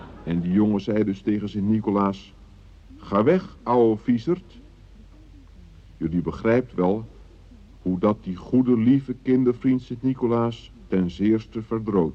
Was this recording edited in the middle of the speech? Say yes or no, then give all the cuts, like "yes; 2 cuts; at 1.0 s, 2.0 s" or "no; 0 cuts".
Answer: no; 0 cuts